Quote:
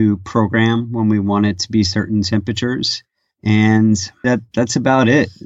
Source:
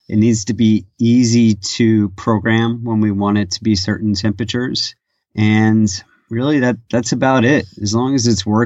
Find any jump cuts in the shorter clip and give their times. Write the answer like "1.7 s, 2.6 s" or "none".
4.2 s

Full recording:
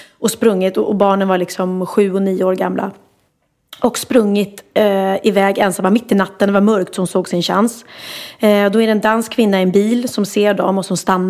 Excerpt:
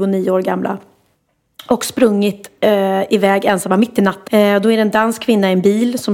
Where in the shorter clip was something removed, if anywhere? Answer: 4.3 s

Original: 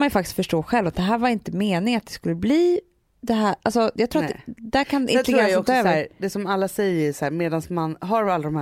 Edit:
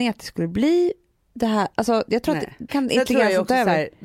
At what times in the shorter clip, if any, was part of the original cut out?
2.7 s

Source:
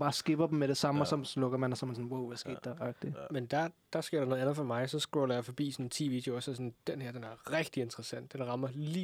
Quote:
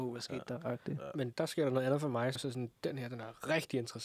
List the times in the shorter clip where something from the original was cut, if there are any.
1.3 s, 2.4 s

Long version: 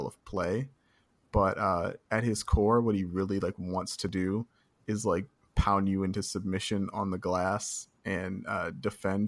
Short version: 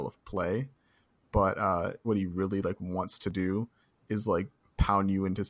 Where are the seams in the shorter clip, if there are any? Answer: 2.0 s

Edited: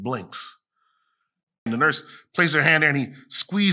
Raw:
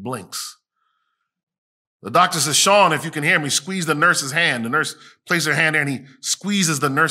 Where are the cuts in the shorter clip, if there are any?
1.7 s

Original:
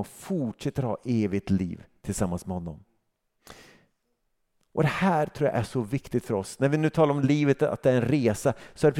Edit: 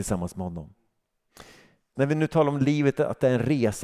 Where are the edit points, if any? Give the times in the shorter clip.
2.0 s

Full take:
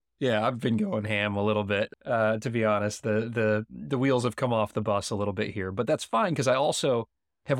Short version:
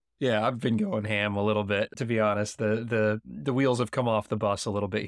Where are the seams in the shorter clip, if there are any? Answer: 1.9 s

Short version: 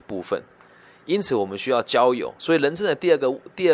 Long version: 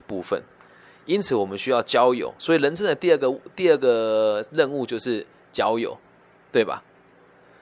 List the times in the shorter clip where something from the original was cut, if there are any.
none

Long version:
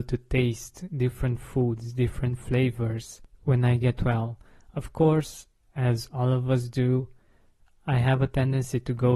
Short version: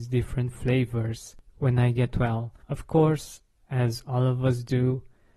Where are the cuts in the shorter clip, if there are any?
2.6 s

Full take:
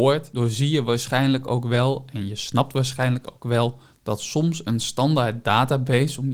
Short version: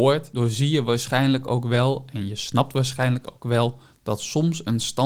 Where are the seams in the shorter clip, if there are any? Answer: none

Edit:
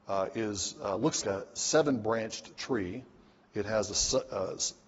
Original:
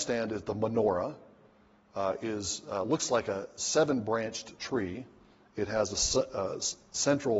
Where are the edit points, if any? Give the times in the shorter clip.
1.2 s

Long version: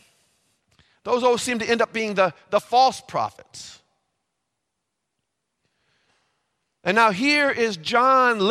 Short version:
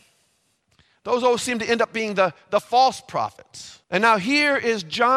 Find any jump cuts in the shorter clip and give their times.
3.8 s

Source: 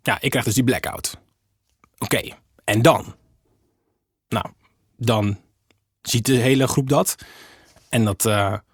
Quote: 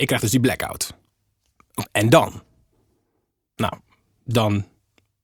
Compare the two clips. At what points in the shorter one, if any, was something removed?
1.9 s

